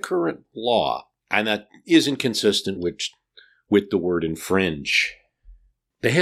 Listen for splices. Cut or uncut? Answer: uncut